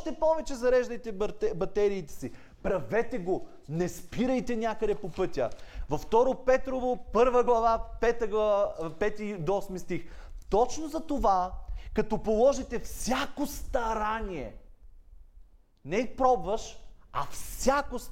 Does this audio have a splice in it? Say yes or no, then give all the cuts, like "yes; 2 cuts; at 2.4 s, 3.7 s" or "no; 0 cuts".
no; 0 cuts